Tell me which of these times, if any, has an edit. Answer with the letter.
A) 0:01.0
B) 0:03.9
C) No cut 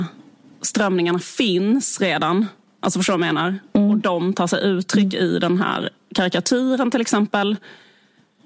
C